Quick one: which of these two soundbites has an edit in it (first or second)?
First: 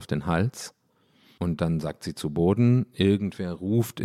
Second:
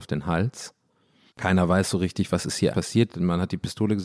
second